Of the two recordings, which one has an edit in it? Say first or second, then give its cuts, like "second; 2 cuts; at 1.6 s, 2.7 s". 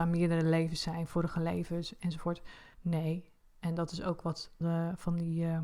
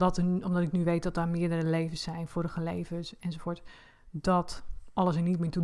first; 2 cuts; at 2.7 s, 4.6 s